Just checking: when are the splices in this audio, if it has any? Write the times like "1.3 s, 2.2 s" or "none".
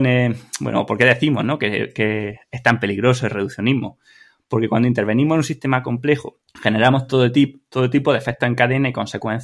6.4 s

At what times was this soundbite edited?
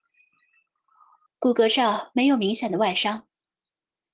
1.3 s

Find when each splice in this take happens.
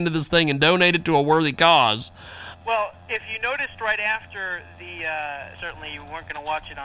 2.6 s, 5.5 s

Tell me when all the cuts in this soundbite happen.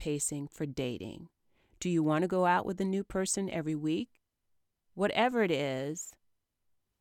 4.9 s

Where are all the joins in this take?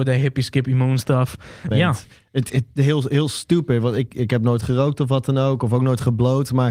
1.7 s

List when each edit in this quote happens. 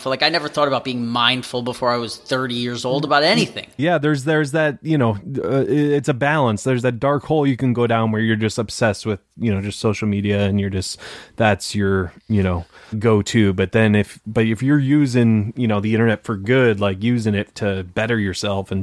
3.8 s, 12.9 s

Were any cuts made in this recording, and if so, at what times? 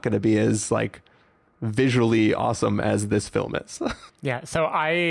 4.1 s

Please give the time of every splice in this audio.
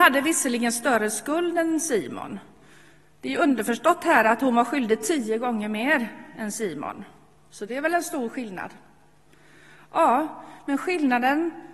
none

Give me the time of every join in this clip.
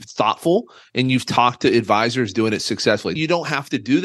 3.2 s

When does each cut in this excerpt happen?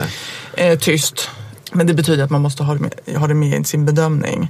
1.6 s

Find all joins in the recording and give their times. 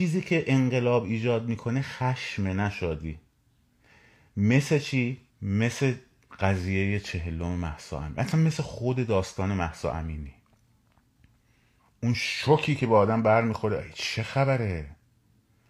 5.3 s

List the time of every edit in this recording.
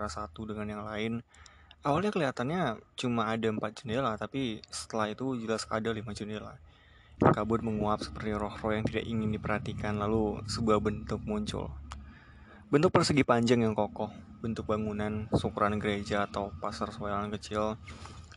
7.2 s

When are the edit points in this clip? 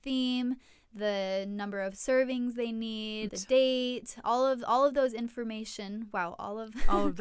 3.3 s

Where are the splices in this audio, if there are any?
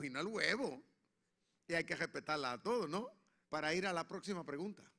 3.4 s

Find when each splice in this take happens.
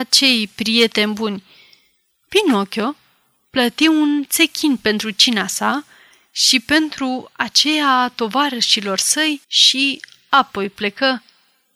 2.1 s, 9.4 s

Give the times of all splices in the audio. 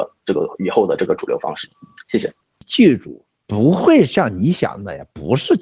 none

